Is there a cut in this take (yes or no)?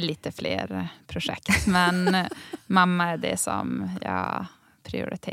no